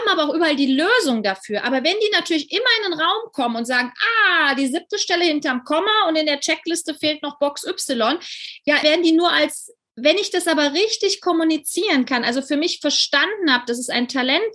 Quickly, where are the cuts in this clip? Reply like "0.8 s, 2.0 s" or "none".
8.8 s